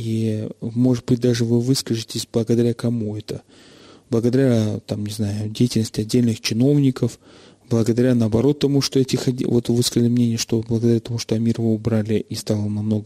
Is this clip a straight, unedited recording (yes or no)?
yes